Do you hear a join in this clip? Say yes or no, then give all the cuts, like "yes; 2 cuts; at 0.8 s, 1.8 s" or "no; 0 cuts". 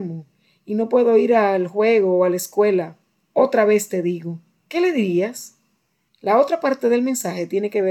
yes; 1 cut; at 6.1 s